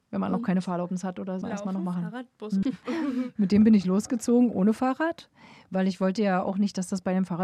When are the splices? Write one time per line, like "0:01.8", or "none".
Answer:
0:01.4
0:02.6